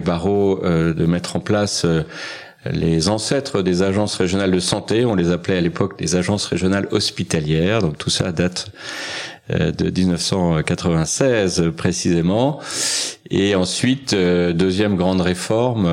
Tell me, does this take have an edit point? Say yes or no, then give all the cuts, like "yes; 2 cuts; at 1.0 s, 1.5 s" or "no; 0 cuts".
no; 0 cuts